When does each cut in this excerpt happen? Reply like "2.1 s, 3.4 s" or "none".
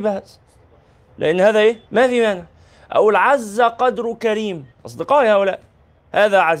1.8 s